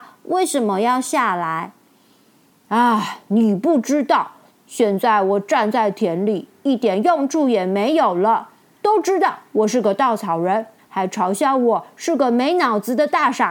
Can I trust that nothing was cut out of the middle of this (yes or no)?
no